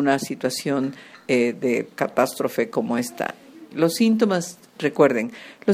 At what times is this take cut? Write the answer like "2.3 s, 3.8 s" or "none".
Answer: 3.7 s